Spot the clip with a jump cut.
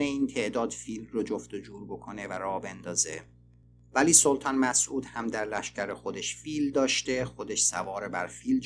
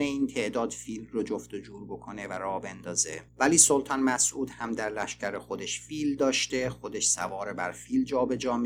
second; 1 cut; at 3.3 s

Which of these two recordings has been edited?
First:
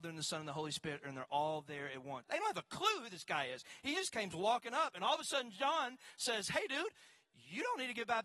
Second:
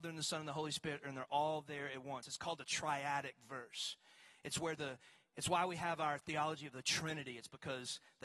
first; 1 cut; at 2.2 s

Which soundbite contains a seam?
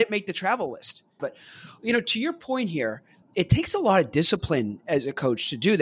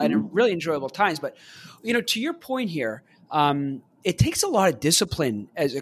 first; 2 cuts; at 1.2 s, 3.2 s

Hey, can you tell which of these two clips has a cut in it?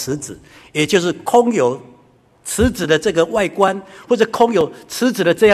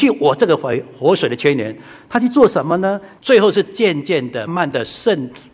second; 2 cuts; at 3.2 s, 4.5 s

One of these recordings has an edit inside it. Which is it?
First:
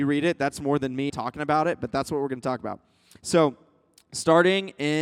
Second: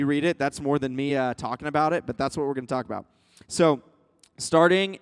first; 1 cut; at 1.1 s

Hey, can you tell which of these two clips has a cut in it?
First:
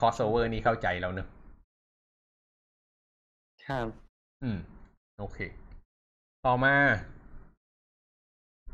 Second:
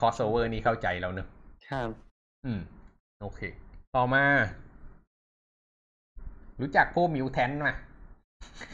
second; 2 cuts; at 1.6 s, 3.8 s

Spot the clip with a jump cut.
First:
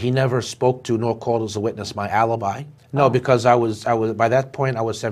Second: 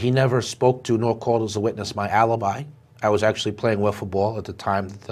first; 1 cut; at 2.8 s

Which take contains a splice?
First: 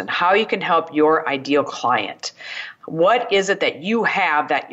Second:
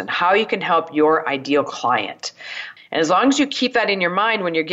second; 1 cut; at 2.8 s

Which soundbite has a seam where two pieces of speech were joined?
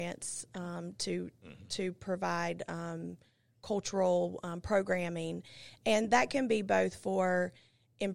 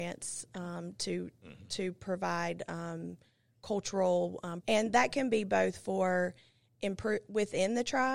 second; 1 cut; at 4.6 s

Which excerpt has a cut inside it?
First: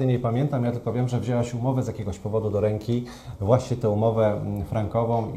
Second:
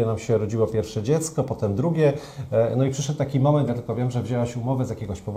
second; 1 cut; at 3.7 s

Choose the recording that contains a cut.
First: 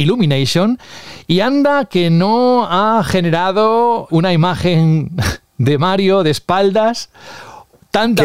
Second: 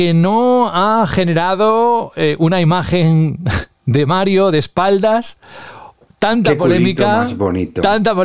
first; 1 cut; at 4.1 s

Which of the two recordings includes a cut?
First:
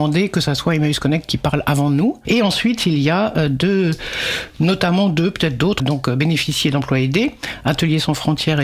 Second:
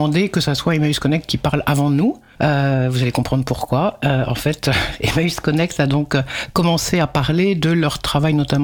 first; 2 cuts; at 2.2 s, 5.8 s

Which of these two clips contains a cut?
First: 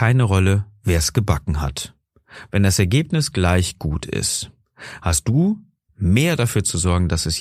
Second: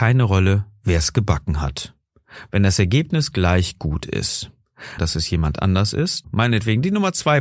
second; 2 cuts; at 5.0 s, 6.2 s

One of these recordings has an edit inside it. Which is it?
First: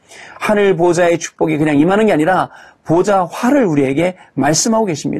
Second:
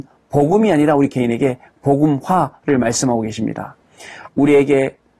second; 1 cut; at 4.3 s

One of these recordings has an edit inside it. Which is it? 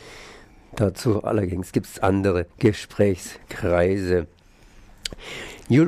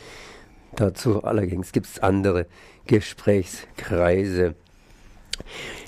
first; 1 cut; at 2.5 s

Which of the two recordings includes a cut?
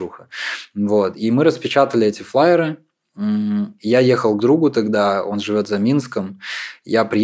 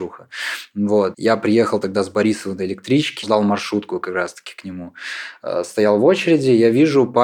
second; 2 cuts; at 1.1 s, 3.2 s

